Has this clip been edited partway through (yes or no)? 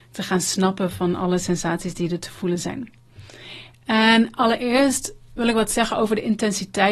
no